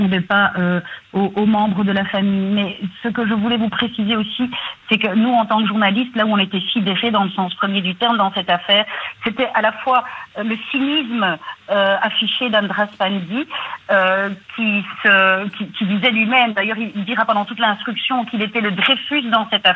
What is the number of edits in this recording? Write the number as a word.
zero